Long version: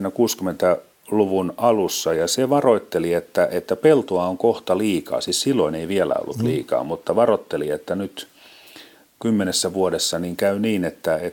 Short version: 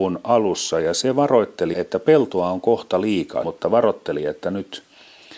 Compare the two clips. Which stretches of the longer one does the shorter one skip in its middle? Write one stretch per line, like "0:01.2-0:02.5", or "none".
0:03.1-0:03.5
0:05.2-0:06.9